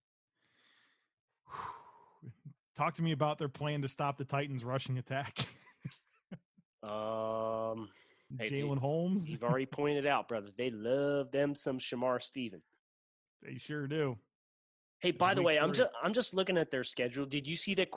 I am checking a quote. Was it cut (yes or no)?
yes